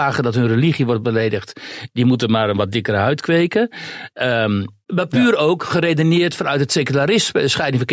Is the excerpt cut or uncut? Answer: cut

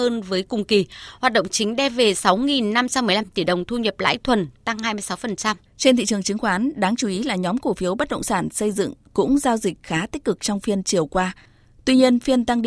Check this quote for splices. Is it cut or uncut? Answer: cut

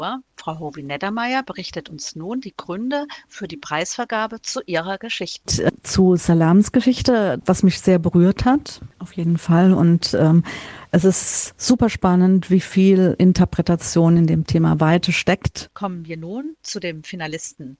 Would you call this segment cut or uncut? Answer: cut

